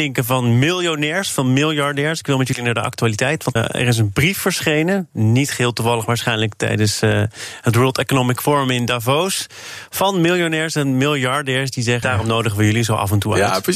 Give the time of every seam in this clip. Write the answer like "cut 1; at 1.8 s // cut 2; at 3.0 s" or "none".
cut 1; at 3.6 s // cut 2; at 12.0 s